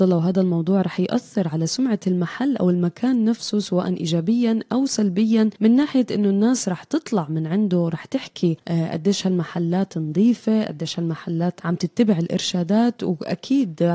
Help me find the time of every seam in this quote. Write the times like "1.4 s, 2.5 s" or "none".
none